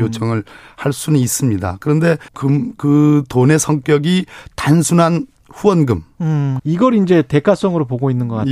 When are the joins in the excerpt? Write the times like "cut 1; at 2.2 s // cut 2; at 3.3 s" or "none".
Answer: cut 1; at 2.3 s // cut 2; at 6.6 s